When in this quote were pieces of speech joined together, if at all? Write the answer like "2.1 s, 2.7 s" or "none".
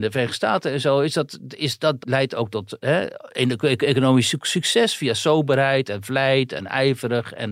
2.0 s